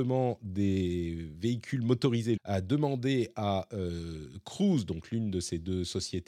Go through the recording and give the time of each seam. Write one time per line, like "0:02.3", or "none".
0:02.4